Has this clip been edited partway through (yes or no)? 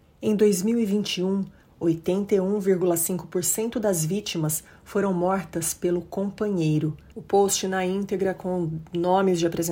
yes